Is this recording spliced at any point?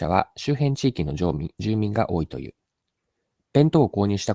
no; 0 cuts

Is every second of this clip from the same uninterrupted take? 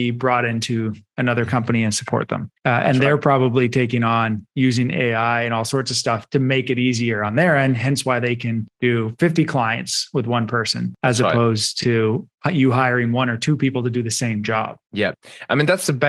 yes; 0 cuts

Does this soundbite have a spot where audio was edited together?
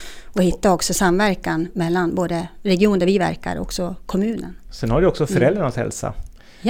no; 0 cuts

